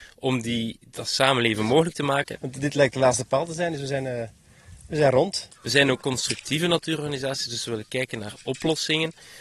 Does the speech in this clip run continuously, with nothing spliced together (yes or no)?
no